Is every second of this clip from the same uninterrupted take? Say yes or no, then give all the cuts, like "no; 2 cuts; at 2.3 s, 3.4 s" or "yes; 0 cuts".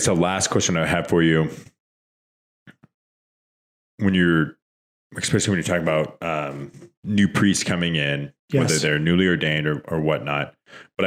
yes; 0 cuts